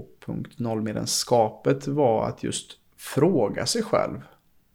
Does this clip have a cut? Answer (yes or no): no